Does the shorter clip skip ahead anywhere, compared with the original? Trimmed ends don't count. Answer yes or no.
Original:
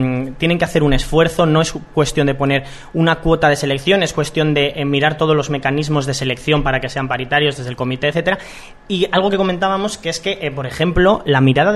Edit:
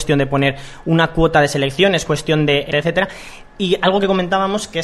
yes